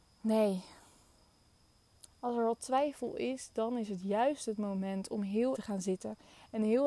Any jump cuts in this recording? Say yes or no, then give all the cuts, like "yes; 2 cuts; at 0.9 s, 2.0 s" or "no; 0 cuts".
yes; 1 cut; at 5.5 s